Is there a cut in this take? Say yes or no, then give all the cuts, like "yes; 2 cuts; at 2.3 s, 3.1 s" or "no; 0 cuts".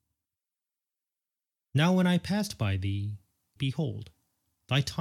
yes; 1 cut; at 3.6 s